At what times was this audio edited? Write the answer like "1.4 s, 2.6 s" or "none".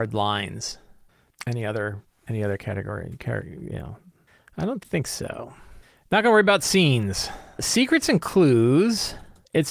1.3 s